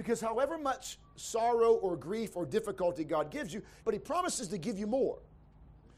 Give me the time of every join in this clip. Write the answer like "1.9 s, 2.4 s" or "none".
3.8 s